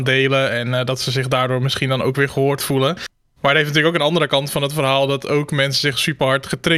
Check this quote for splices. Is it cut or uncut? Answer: uncut